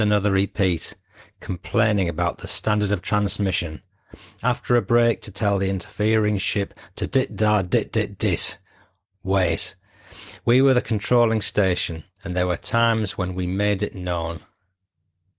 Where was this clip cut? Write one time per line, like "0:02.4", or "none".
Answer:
none